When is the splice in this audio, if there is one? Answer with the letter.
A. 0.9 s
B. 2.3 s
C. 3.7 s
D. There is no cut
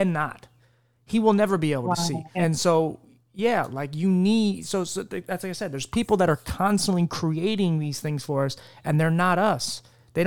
B